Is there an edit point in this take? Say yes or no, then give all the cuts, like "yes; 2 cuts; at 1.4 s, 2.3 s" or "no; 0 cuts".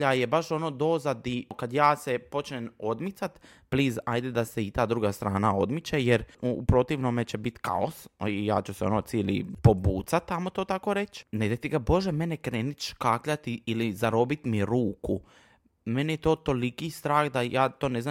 no; 0 cuts